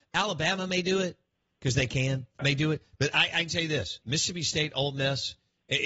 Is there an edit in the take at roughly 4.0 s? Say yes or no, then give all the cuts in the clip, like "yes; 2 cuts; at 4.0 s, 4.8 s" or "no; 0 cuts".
yes; 2 cuts; at 2.4 s, 4.0 s